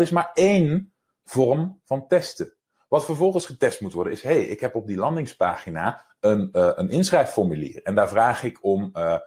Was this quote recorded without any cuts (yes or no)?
yes